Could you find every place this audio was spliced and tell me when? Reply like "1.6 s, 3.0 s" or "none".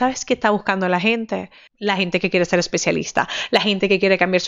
1.7 s